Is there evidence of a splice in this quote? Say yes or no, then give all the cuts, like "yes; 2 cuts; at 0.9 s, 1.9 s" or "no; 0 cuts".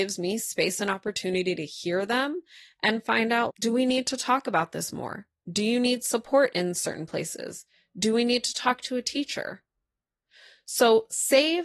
yes; 1 cut; at 3.5 s